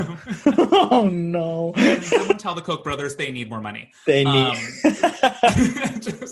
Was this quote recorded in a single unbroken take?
yes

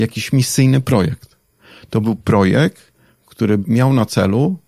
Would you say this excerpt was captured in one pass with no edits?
yes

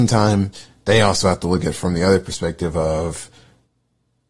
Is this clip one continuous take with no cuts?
yes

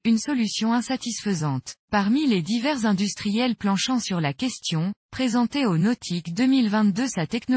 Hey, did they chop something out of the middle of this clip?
yes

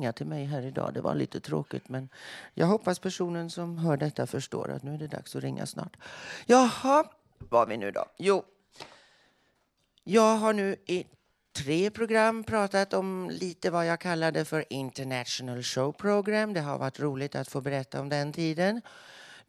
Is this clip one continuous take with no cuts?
no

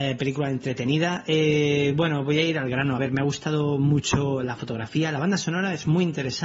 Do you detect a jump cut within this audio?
no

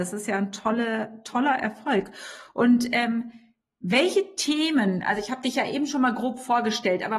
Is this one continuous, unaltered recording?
yes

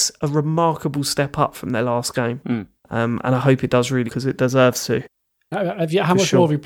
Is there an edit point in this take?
yes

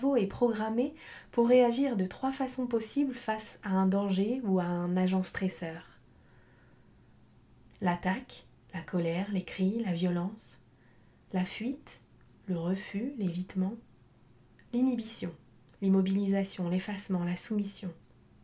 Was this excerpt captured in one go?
yes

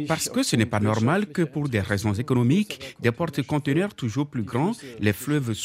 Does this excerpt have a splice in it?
no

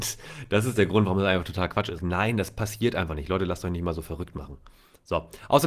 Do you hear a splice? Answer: yes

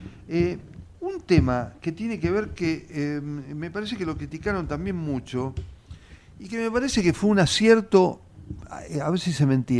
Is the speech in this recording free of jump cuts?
yes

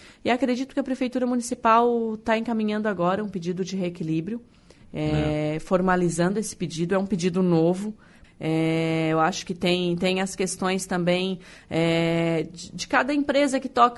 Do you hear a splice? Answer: yes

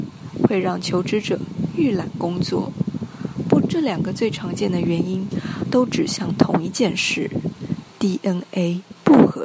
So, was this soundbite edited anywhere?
yes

